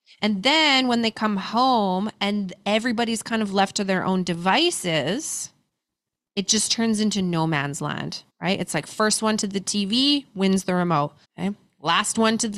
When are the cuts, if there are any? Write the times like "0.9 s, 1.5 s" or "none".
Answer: 8.3 s, 11.2 s